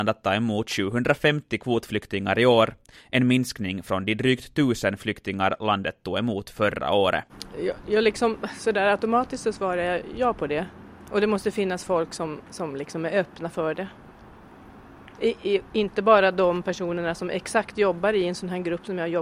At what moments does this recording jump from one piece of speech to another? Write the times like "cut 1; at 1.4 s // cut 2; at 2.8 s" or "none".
cut 1; at 11.1 s